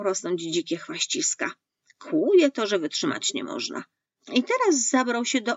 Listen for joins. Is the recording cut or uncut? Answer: cut